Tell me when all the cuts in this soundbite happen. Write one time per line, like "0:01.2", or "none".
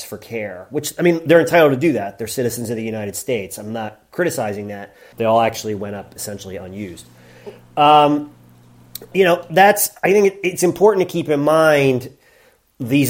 0:05.1
0:09.1